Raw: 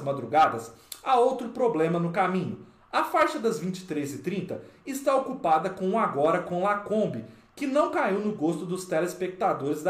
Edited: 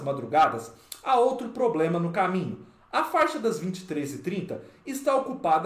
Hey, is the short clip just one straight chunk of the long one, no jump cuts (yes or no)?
yes